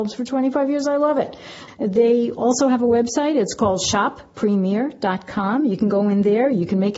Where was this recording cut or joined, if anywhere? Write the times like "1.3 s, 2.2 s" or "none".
1.7 s